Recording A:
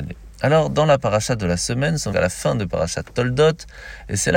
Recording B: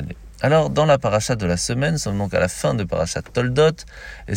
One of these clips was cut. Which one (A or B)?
A